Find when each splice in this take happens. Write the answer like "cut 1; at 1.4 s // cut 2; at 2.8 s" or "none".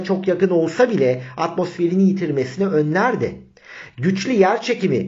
none